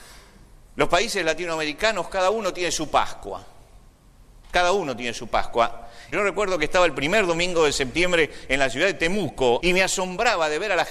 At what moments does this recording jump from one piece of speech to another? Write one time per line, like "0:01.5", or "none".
0:06.1
0:09.6